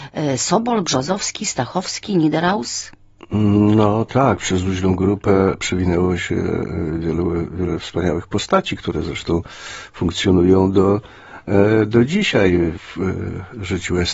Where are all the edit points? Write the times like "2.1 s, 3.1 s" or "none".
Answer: none